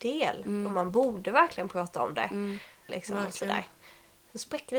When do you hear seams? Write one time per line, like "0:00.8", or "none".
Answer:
0:02.9